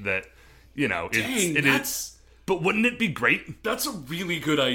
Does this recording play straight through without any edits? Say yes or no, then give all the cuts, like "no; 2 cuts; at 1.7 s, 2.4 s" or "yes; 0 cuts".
yes; 0 cuts